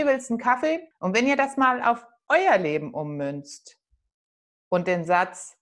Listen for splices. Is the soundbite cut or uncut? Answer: cut